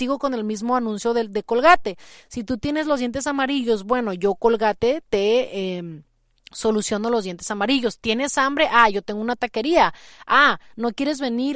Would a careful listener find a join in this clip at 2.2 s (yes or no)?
yes